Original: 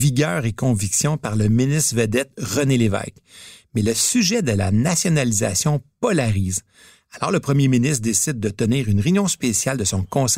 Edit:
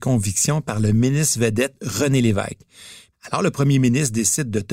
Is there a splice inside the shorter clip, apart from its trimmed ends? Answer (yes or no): yes